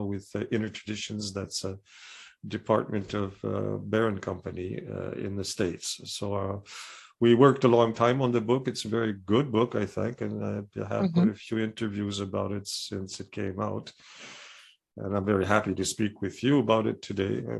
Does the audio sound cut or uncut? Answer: uncut